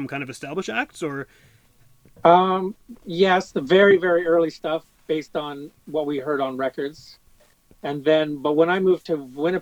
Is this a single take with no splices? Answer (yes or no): yes